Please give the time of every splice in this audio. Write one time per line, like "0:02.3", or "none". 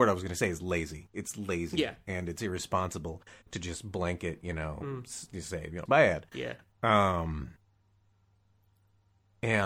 0:05.9